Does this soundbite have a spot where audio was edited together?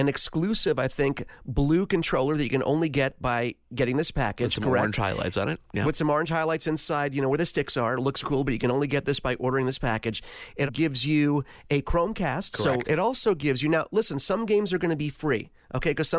yes; 3 cuts; at 8.2 s, 10.7 s, 12.8 s

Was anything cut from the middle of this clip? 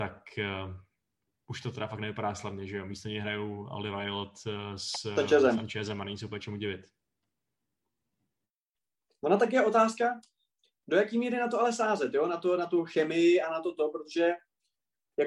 no; 0 cuts

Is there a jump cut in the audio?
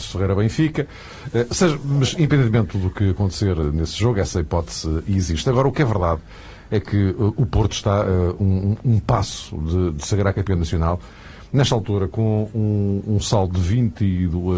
no; 0 cuts

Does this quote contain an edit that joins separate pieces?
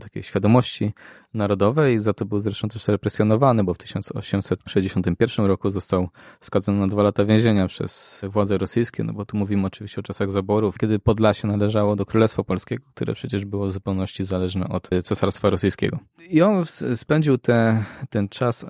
no; 0 cuts

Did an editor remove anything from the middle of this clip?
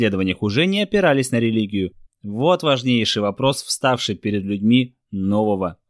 yes; 1 cut; at 2.1 s

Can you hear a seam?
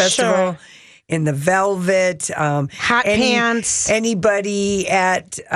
no; 0 cuts

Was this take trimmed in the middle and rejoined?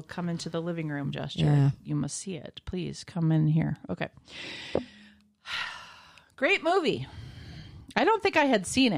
no; 0 cuts

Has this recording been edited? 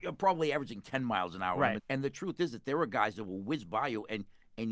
yes; 1 cut; at 1.8 s

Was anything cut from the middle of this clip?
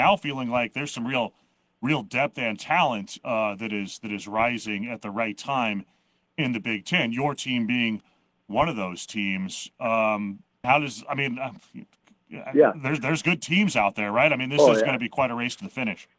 yes; 1 cut; at 10.6 s

